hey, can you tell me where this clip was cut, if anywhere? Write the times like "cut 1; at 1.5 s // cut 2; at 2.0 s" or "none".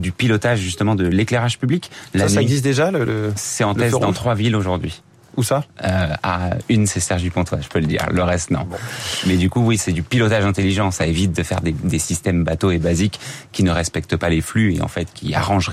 none